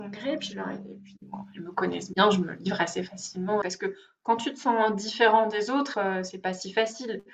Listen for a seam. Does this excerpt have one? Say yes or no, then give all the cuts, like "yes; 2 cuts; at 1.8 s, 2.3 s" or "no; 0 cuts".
yes; 2 cuts; at 3.6 s, 5.9 s